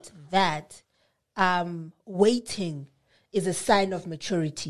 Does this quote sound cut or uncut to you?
uncut